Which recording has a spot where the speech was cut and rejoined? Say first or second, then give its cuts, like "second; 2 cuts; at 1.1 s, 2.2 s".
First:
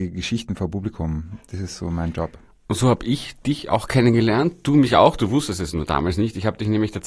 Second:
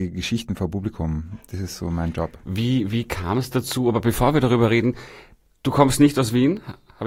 second; 1 cut; at 2.4 s